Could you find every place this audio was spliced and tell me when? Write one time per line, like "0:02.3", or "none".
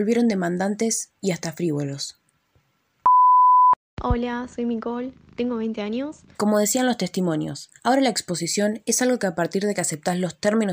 0:06.3
0:07.8